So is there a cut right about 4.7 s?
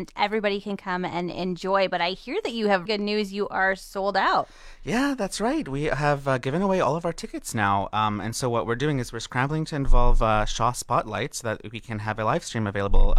no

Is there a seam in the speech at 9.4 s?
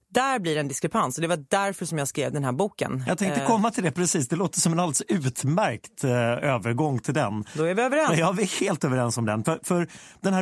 no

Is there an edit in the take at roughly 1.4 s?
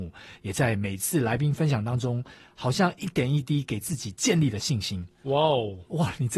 no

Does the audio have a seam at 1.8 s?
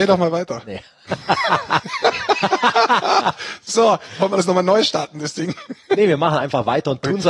yes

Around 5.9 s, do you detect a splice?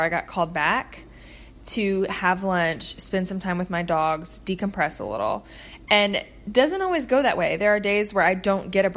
no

